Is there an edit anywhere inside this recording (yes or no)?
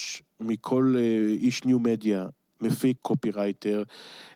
yes